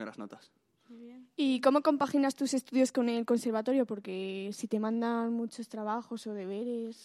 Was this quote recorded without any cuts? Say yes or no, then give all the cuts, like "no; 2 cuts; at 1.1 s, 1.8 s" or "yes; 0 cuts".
yes; 0 cuts